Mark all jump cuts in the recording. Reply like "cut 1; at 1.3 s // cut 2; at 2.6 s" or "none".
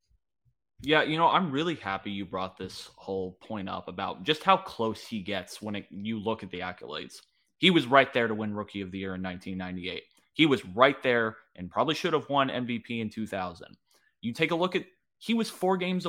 none